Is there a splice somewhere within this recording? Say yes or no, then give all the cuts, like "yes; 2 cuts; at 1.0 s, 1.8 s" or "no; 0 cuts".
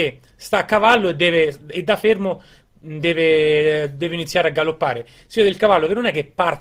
no; 0 cuts